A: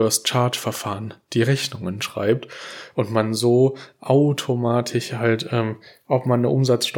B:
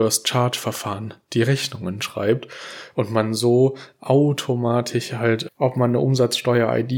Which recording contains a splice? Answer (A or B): B